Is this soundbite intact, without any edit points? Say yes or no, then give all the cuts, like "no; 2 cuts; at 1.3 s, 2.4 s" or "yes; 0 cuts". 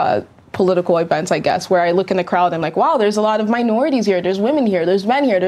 yes; 0 cuts